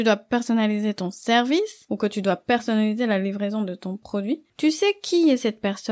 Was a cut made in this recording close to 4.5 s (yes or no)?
yes